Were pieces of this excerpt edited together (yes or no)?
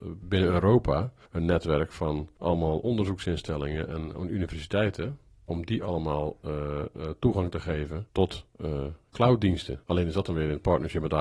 no